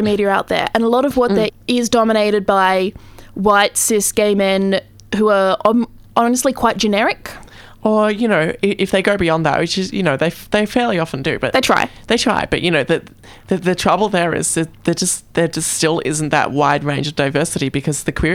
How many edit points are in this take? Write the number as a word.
one